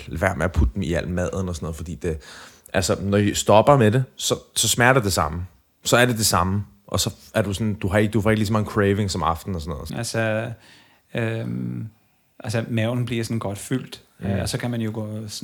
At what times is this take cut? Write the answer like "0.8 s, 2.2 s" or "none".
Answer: 9.9 s